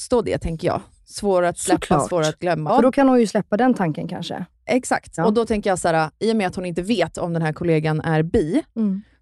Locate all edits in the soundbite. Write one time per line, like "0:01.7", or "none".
0:02.7
0:05.2